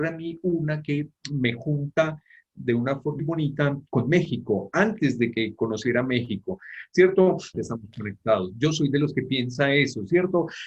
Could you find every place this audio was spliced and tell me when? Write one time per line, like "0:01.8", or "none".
0:03.2
0:07.5